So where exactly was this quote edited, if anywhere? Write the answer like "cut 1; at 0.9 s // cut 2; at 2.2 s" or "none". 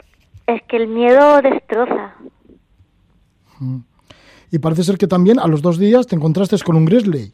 none

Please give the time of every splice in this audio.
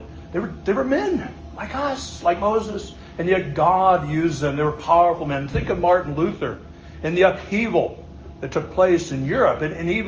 none

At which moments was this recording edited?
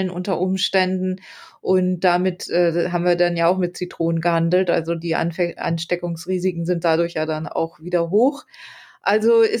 none

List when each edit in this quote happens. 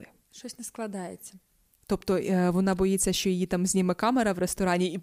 none

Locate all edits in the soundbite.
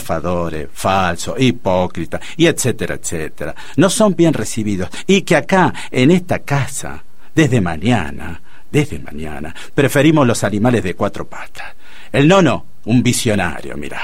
none

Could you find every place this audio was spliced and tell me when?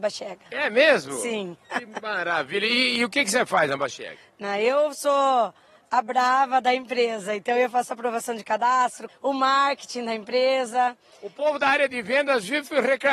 cut 1; at 9.1 s

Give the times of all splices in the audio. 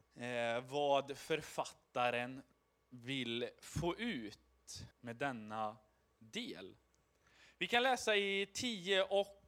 cut 1; at 4.9 s

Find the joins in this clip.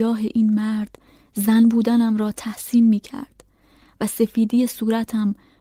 none

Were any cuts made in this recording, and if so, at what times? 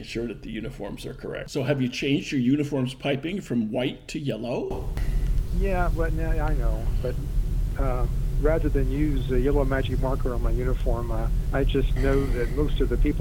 cut 1; at 1.4 s

